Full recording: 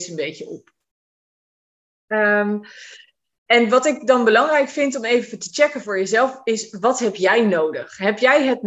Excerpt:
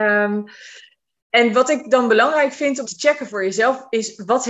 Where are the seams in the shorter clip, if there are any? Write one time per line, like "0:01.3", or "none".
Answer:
0:02.8